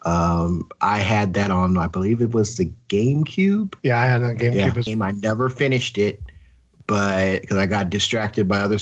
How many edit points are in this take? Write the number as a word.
two